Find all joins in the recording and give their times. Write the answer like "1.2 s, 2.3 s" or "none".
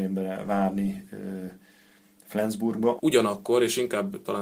3.0 s